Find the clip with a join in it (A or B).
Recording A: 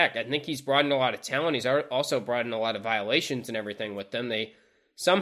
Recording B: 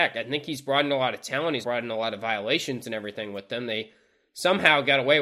B